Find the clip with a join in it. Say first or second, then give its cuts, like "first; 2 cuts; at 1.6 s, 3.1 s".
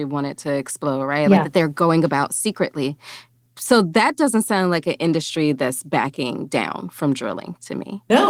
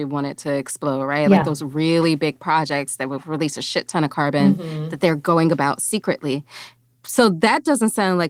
first; 1 cut; at 1.4 s